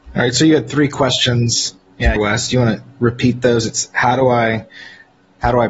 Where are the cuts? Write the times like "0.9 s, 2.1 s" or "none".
2.2 s